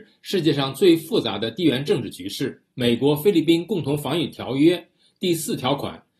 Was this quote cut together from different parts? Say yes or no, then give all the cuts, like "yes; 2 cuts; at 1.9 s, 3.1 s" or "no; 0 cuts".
yes; 1 cut; at 2.7 s